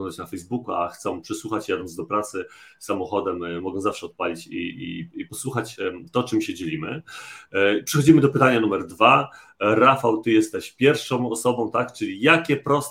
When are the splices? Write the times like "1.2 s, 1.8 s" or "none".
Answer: none